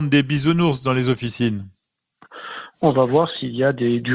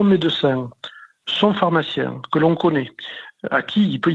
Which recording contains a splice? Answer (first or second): first